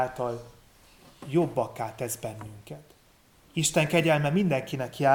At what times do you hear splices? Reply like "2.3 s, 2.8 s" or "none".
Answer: 3.3 s